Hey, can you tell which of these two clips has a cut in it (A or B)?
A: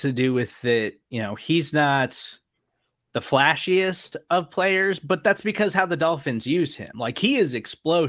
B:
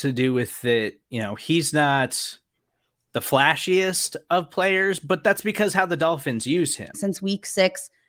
B